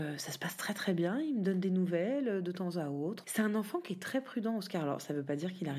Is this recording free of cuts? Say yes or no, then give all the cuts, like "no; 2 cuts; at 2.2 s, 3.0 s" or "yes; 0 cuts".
no; 1 cut; at 3.2 s